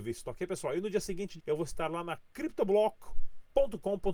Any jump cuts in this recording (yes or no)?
yes